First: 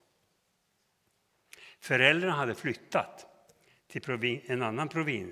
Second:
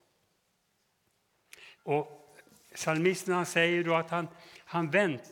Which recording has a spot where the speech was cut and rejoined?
second; 1 cut; at 1.8 s

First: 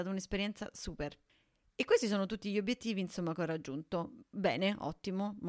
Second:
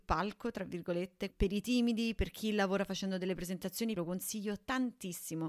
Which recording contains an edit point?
second; 2 cuts; at 1.3 s, 4.0 s

